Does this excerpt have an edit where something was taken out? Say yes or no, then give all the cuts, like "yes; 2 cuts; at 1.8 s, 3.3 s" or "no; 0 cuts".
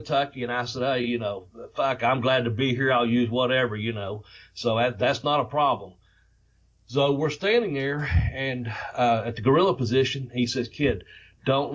no; 0 cuts